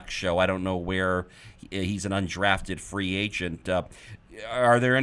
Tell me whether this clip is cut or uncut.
uncut